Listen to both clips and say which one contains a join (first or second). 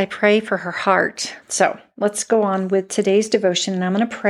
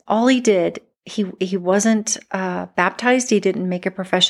first